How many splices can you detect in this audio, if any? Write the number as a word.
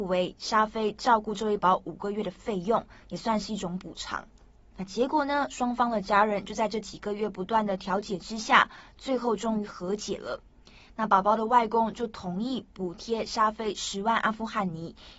two